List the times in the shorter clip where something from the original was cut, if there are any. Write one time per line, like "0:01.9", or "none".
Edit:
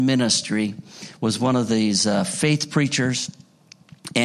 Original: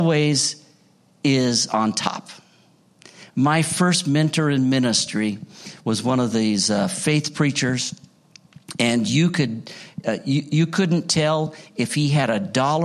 none